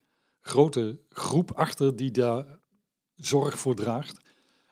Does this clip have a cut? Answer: no; 0 cuts

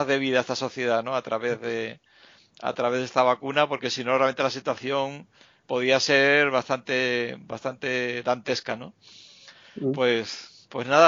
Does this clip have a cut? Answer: yes; 1 cut; at 5.6 s

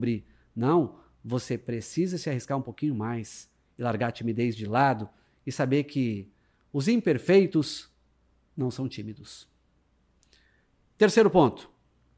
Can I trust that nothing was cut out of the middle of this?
yes; 0 cuts

